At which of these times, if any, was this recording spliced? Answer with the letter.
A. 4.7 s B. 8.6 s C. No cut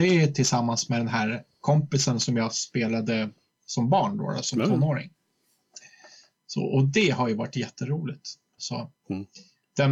B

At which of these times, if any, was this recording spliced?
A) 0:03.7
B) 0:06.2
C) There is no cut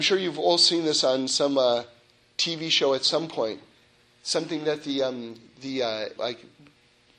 B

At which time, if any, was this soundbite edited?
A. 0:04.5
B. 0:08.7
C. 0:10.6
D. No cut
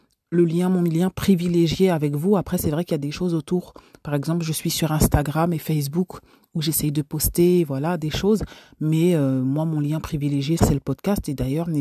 C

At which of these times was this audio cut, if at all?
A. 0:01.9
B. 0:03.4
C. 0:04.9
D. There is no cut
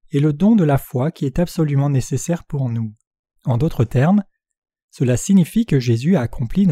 B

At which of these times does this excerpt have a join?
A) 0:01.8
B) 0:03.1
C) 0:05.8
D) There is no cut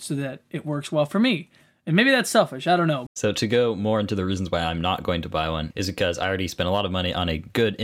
B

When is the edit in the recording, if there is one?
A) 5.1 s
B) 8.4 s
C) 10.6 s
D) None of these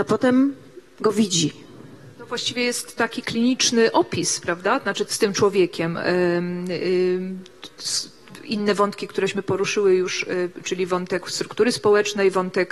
A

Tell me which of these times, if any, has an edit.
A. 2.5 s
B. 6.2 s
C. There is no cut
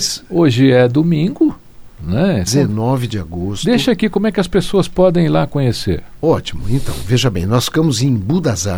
A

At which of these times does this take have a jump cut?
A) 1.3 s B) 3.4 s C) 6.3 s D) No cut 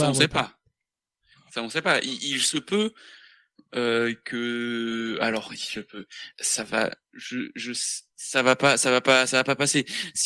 C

